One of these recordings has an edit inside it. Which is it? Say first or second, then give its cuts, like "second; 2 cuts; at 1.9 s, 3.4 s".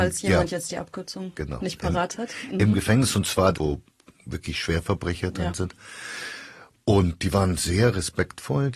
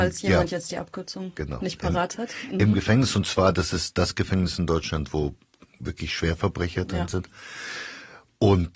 first; 1 cut; at 3.5 s